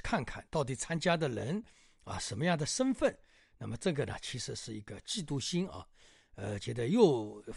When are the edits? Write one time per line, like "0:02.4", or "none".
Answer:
none